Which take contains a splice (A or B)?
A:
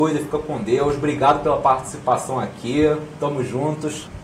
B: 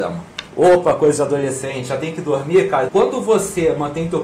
B